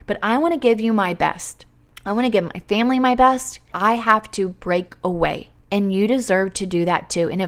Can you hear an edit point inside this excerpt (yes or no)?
yes